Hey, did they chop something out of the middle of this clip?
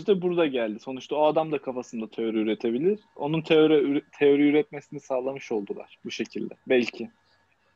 yes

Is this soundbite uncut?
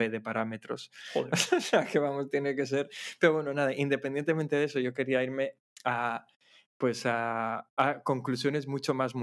yes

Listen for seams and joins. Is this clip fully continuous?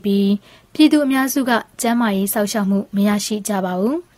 yes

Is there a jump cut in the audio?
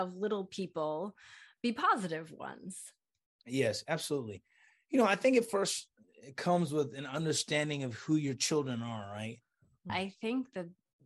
yes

